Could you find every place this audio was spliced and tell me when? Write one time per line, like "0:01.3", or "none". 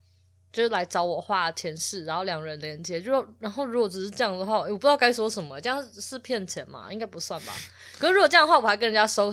none